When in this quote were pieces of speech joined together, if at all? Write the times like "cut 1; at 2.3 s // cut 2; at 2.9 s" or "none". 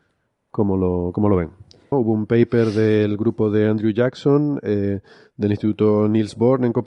cut 1; at 1.9 s

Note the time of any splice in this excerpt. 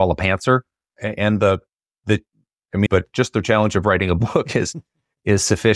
cut 1; at 0.9 s // cut 2; at 2.9 s

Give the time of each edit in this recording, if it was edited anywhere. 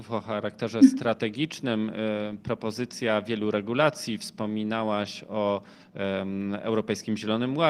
none

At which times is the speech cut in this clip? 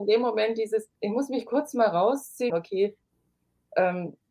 cut 1; at 1.0 s // cut 2; at 2.5 s

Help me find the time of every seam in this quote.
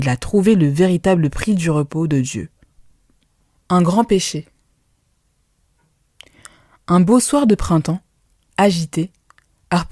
cut 1; at 3.6 s // cut 2; at 8.5 s

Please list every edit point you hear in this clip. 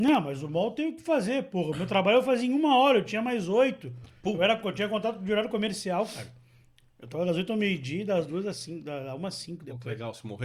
none

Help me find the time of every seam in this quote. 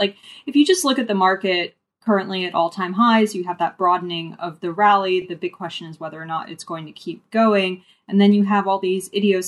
none

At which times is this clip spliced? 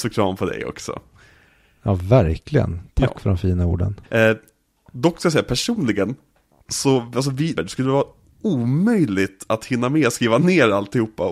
cut 1; at 4.0 s // cut 2; at 7.5 s

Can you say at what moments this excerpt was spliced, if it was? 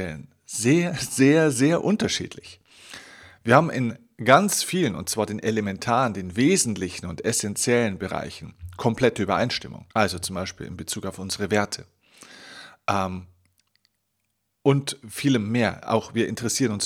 cut 1; at 9.9 s

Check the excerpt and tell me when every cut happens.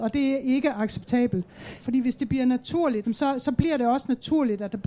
cut 1; at 1.8 s // cut 2; at 3.0 s

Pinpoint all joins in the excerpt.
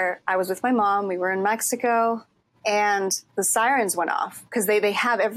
cut 1; at 3.3 s

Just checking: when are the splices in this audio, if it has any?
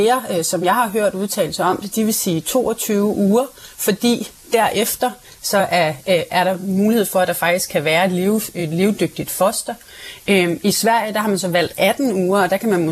none

